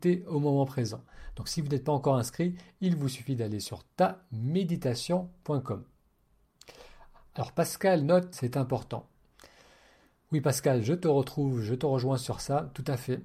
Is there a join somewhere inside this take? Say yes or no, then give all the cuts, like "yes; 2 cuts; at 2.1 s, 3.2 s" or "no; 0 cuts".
yes; 1 cut; at 8.3 s